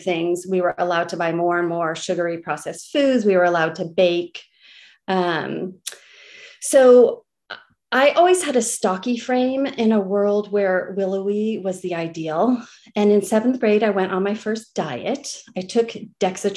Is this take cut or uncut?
uncut